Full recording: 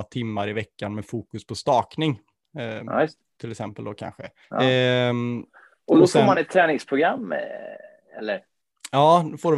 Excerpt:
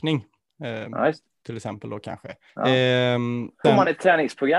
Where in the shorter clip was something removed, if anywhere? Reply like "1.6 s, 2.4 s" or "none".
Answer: 3.6 s